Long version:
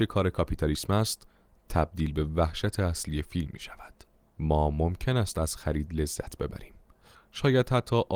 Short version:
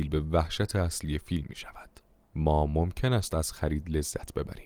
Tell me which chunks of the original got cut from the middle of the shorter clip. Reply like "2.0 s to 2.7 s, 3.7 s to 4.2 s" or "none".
none

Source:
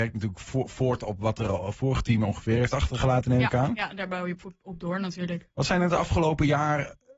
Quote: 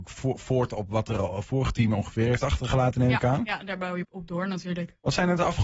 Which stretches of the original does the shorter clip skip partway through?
4.3 s to 4.6 s

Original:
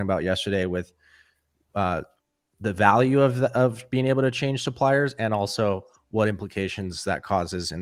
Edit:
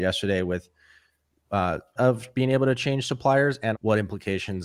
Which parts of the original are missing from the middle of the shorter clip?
2.2 s to 3.5 s, 5.3 s to 6.0 s

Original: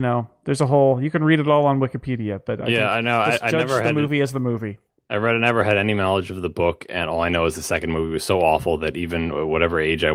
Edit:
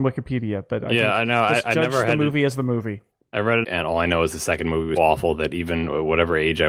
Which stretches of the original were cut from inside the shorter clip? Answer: 5.4 s to 6.9 s, 8.2 s to 8.4 s

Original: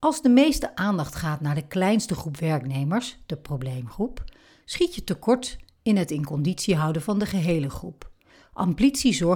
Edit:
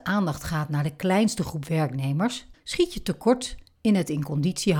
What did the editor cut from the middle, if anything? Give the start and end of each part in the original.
3.3 s to 4.6 s

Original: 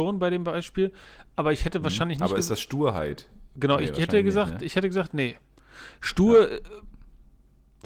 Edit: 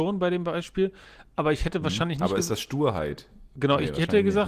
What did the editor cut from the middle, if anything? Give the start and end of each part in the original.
none

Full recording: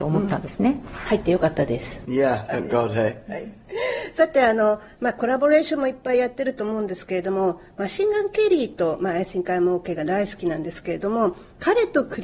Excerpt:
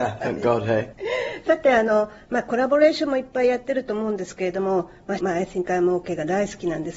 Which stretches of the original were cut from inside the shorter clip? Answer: 3.2 s to 3.6 s, 7.9 s to 9.0 s

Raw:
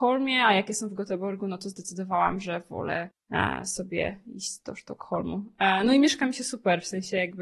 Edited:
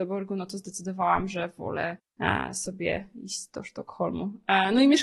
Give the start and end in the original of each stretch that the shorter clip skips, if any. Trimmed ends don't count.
none

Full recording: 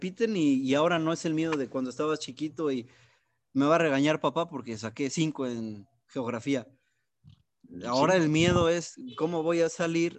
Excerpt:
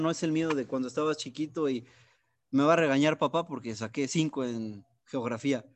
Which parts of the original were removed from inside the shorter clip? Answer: none

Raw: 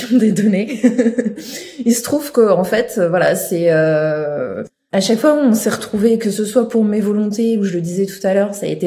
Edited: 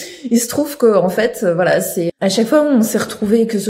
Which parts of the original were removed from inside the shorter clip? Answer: 3.6 s to 4.8 s

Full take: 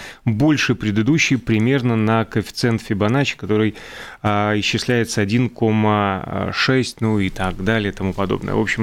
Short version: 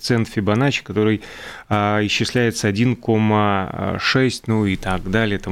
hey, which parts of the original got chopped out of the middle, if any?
none

